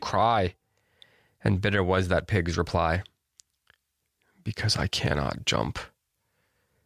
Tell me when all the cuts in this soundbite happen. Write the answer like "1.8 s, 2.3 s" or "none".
none